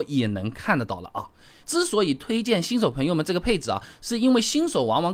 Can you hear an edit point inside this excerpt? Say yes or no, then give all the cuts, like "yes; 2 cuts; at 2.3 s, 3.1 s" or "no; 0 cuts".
yes; 1 cut; at 1.6 s